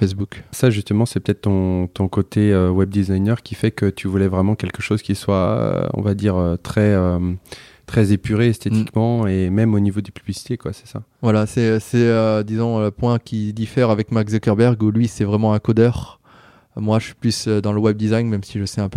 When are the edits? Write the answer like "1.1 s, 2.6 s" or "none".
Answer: none